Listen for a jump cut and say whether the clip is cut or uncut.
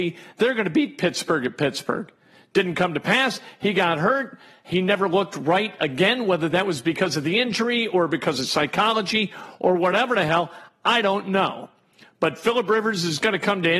uncut